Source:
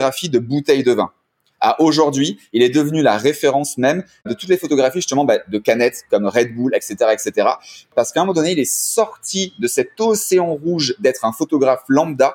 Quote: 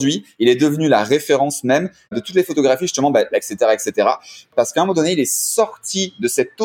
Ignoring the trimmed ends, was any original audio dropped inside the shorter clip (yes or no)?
yes